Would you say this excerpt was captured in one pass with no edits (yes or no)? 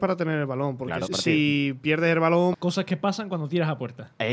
no